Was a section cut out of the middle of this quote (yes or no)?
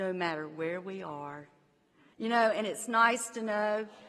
yes